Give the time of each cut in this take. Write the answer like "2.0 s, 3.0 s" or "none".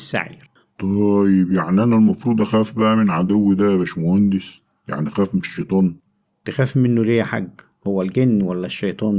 none